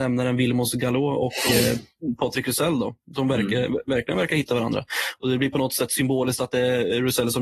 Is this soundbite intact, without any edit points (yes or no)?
yes